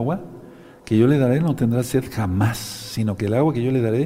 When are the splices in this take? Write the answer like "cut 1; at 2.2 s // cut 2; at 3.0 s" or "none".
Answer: none